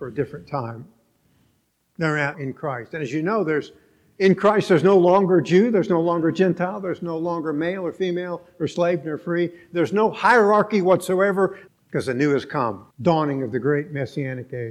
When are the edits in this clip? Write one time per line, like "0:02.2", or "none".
0:02.3
0:11.7
0:12.9